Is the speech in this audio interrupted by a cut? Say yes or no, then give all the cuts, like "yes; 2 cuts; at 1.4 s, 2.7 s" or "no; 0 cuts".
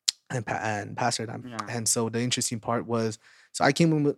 yes; 1 cut; at 1.4 s